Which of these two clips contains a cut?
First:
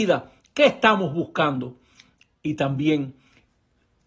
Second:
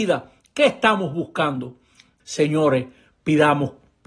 second; 1 cut; at 2.2 s

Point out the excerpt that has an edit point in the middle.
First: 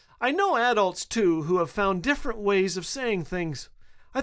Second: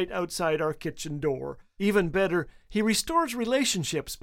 second; 1 cut; at 1.8 s

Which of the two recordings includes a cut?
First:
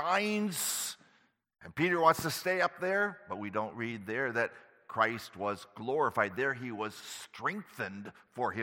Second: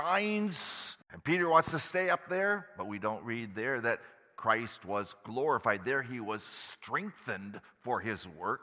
second; 1 cut; at 1.0 s

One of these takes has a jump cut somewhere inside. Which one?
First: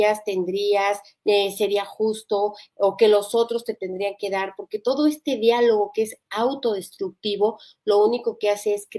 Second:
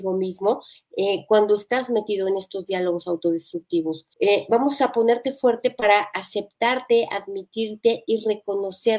second; 1 cut; at 4.1 s

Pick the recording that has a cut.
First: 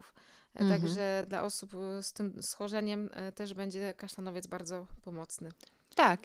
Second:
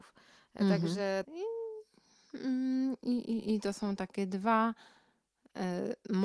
second; 1 cut; at 1.2 s

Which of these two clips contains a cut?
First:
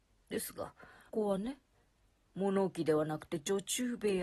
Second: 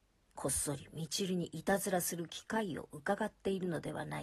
first; 1 cut; at 1.1 s

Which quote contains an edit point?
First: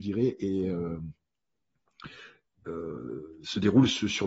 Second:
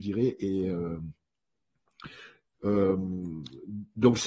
second; 1 cut; at 2.5 s

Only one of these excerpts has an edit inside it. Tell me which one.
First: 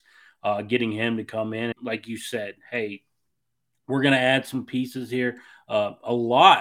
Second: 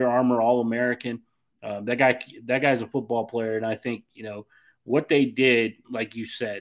first; 1 cut; at 1.7 s

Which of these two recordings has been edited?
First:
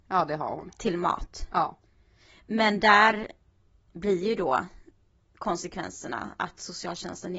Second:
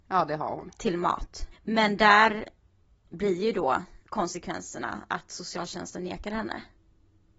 second; 2 cuts; at 1.5 s, 4.0 s

